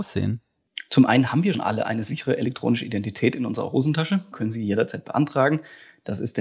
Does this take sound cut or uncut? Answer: cut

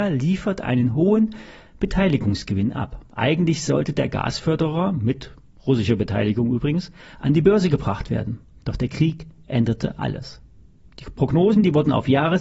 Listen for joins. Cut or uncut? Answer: uncut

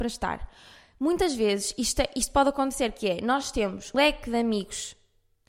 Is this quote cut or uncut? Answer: cut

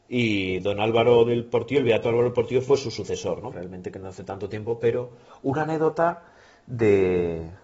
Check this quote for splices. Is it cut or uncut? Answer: cut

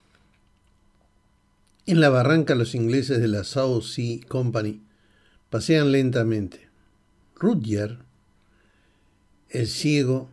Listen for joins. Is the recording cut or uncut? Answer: uncut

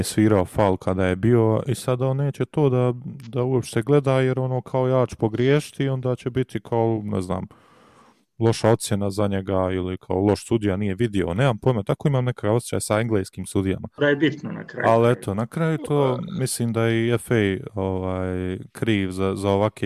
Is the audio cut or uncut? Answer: cut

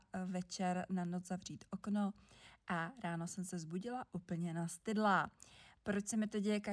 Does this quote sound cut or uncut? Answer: uncut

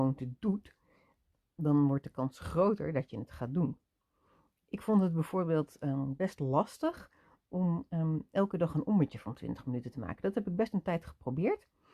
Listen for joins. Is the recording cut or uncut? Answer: uncut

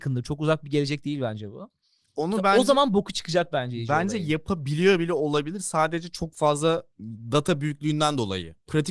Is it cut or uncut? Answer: uncut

